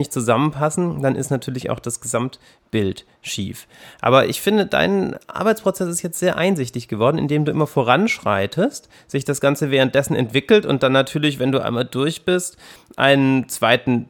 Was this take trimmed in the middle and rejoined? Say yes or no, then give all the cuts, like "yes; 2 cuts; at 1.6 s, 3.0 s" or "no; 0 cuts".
no; 0 cuts